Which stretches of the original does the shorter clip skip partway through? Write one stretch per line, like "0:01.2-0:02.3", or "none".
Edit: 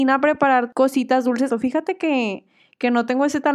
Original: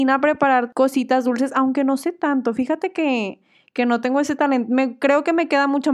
0:01.5-0:02.4